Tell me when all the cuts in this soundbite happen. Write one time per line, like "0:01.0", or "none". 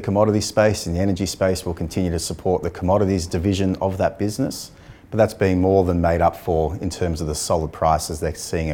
0:05.0